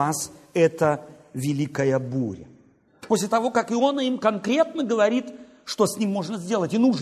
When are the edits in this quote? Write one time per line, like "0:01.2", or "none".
0:02.9